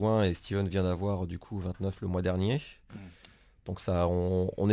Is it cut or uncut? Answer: uncut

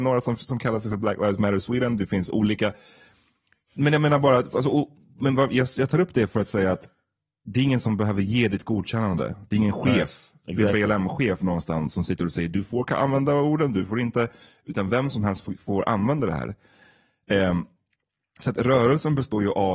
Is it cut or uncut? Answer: uncut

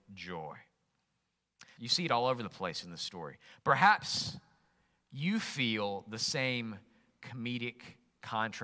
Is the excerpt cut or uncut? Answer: cut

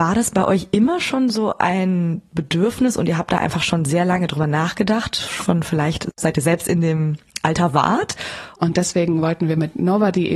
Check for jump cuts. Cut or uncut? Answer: cut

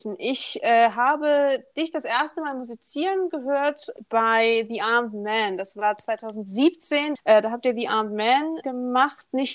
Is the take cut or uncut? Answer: cut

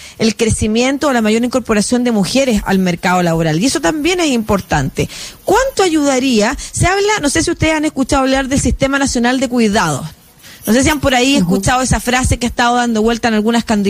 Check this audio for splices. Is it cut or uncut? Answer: uncut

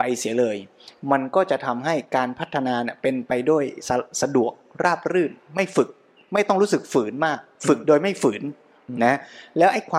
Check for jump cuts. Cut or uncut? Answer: uncut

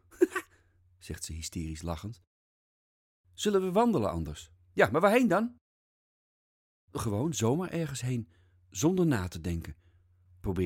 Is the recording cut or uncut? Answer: cut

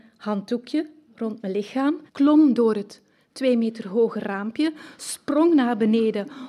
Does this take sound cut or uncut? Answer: cut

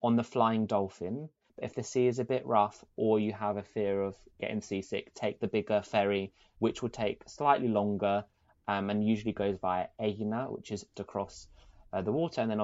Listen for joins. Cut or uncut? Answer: cut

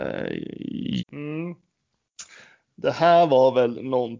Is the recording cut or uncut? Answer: cut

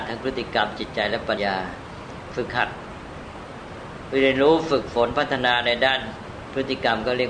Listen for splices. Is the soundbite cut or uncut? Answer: cut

